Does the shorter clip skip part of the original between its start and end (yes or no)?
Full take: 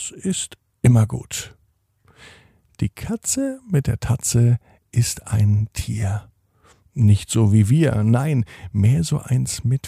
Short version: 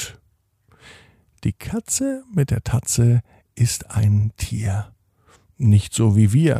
no